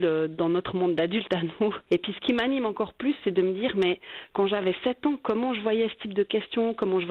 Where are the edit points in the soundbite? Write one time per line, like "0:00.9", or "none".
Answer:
0:01.9